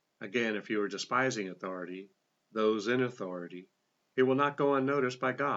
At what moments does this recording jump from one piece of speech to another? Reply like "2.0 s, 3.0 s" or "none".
4.0 s

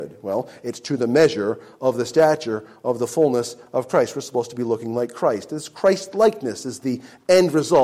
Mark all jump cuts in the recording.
none

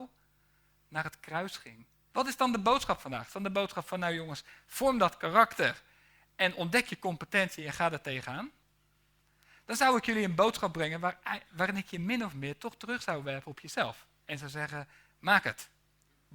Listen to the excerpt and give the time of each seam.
2.1 s

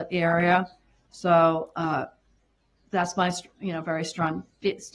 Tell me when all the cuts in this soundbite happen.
1.1 s

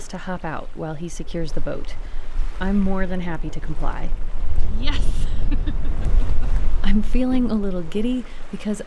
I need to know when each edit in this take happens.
none

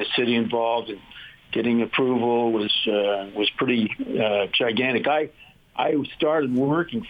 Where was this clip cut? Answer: none

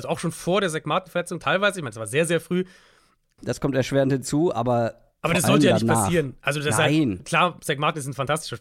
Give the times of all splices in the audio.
3.4 s

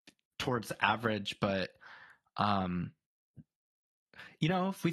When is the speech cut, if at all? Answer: none

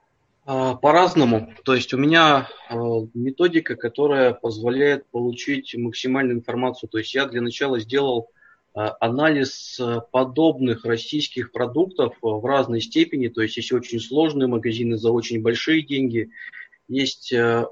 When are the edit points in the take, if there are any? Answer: none

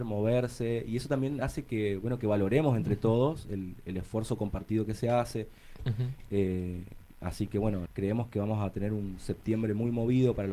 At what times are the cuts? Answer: 5.8 s, 7.9 s

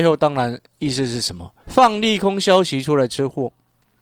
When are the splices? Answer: 1.6 s

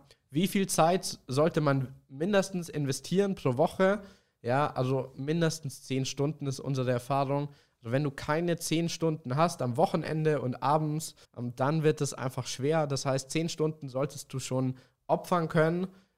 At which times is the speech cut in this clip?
11.2 s

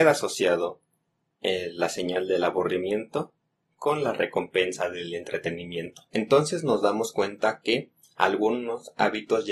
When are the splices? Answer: 6.1 s

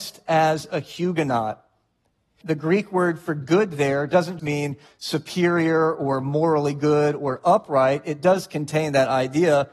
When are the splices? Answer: 2.4 s, 4.4 s

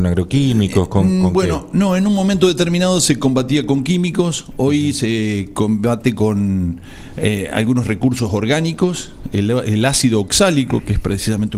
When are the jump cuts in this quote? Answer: none

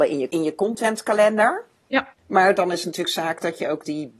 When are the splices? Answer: 2.2 s

